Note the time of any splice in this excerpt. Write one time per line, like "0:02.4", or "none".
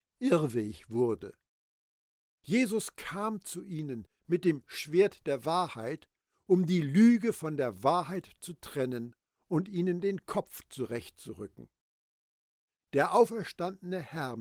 none